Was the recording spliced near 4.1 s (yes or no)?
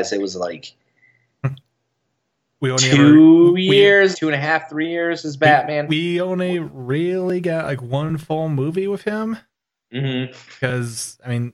yes